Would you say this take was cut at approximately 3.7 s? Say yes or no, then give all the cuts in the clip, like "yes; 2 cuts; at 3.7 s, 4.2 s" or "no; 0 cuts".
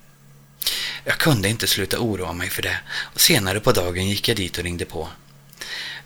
no; 1 cut; at 1.0 s